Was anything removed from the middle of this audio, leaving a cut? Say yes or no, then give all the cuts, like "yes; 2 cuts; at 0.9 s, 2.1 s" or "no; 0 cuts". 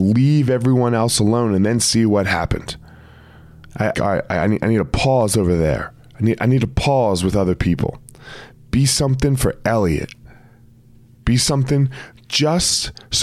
yes; 1 cut; at 3.9 s